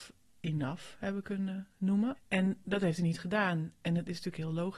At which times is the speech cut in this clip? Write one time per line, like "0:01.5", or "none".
0:02.1